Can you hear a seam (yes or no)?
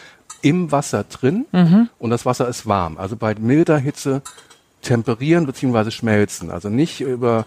no